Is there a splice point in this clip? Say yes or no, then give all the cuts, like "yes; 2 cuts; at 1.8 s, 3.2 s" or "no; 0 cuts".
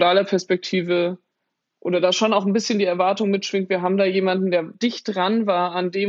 no; 0 cuts